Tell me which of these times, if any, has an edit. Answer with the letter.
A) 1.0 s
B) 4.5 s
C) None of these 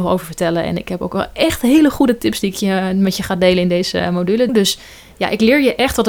B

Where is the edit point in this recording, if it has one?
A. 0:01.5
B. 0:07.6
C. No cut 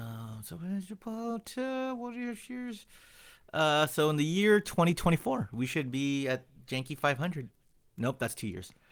C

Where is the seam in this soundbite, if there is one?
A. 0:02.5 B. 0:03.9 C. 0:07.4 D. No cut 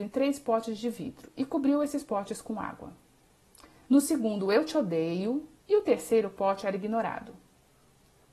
B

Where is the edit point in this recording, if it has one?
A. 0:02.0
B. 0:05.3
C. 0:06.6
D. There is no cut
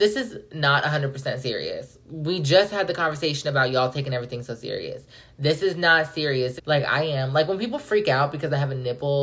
C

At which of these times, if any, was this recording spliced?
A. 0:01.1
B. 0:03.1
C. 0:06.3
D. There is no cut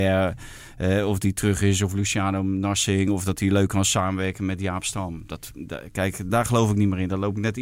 C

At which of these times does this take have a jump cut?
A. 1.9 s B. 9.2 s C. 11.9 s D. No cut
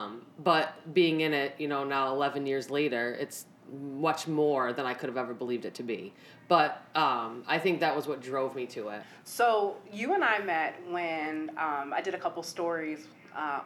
D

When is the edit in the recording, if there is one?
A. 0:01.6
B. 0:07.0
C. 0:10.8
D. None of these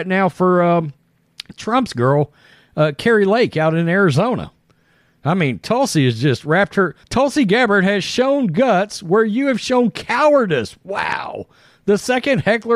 B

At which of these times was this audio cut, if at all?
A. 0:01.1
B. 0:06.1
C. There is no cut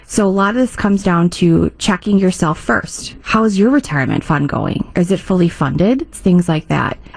B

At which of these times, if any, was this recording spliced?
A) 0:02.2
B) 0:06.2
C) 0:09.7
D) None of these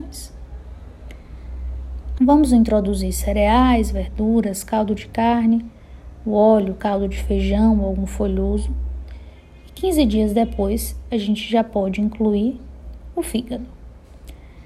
A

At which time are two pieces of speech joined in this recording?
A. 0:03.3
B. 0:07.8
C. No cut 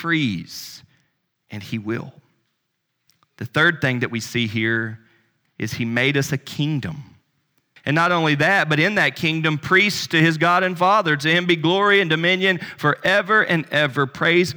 B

